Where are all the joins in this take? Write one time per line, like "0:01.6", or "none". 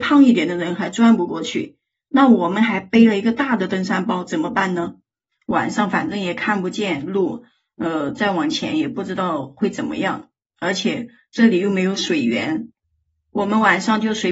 0:05.3